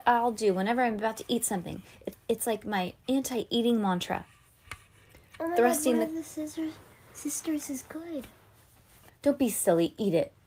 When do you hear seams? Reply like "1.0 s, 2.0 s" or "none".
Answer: 2.1 s, 5.4 s, 9.1 s